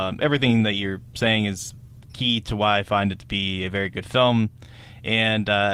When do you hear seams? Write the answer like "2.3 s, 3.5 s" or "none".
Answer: none

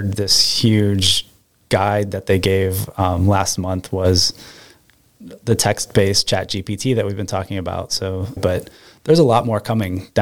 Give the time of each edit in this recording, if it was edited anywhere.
8.4 s

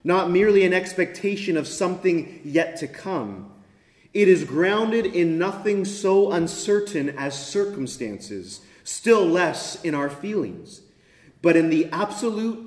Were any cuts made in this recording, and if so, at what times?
none

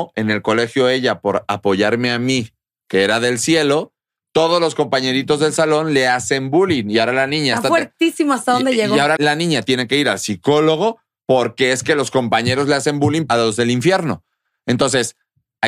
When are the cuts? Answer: 9.2 s, 13.3 s

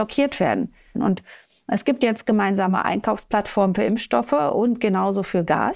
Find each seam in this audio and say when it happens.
0.9 s

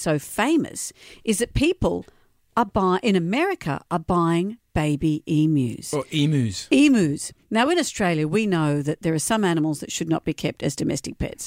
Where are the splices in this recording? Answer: none

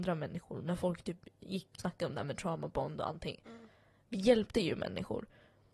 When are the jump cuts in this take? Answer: 1.8 s

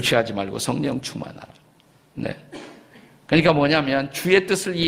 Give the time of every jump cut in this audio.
none

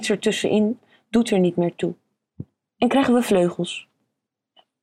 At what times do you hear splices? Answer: 2.7 s

